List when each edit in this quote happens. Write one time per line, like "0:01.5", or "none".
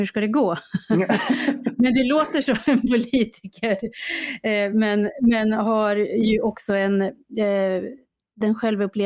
none